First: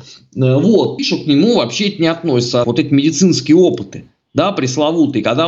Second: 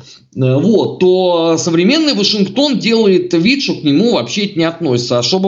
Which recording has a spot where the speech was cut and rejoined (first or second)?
first